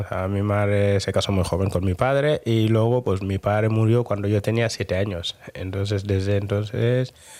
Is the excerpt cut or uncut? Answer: uncut